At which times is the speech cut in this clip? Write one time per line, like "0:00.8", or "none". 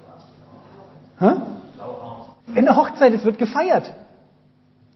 0:02.4